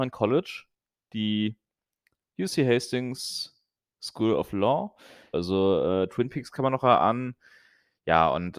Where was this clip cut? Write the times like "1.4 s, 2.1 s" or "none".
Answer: 5.3 s